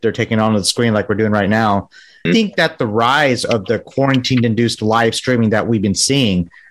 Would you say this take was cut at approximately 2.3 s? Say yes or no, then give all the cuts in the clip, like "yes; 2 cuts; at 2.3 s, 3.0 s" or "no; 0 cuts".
yes; 1 cut; at 2.3 s